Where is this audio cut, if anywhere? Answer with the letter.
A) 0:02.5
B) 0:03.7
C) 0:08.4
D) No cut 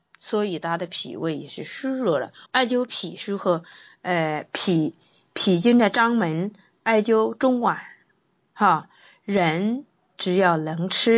A